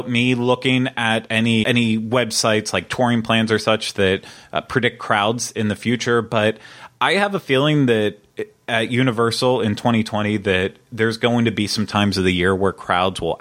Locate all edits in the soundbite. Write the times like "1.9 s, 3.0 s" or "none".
1.6 s